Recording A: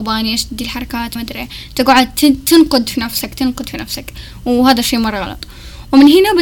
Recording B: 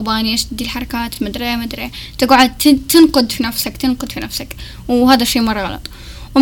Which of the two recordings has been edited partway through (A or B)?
A